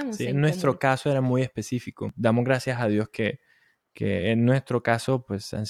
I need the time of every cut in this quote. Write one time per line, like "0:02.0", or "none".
none